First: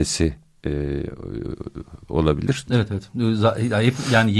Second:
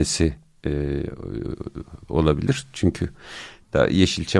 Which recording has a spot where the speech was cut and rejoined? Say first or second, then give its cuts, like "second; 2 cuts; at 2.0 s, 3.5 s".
first; 1 cut; at 2.7 s